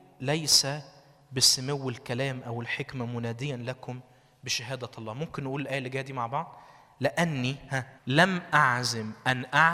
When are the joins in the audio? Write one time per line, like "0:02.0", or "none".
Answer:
0:08.0